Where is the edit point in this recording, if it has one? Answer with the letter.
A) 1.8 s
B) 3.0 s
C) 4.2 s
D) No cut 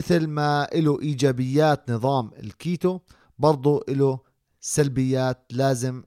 D